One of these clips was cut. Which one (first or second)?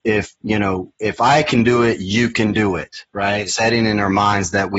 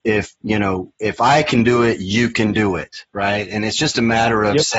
first